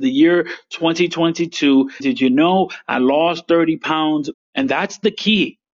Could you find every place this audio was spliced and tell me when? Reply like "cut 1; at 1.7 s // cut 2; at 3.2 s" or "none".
cut 1; at 2.0 s // cut 2; at 4.3 s